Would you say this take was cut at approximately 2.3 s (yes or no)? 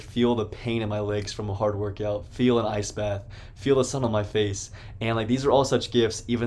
no